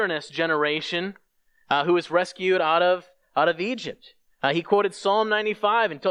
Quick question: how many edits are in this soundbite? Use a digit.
0